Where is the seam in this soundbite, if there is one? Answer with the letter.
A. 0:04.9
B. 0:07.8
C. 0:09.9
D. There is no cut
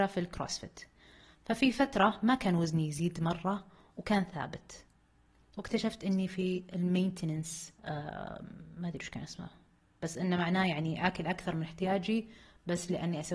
B